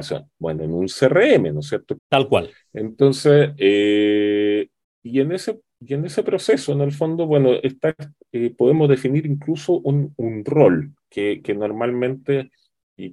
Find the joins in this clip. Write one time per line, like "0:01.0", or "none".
0:02.0